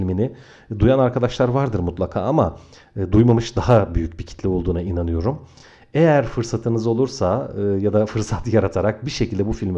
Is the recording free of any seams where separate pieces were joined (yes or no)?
yes